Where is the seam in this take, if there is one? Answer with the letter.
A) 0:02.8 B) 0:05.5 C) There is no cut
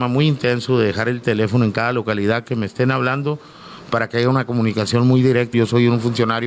B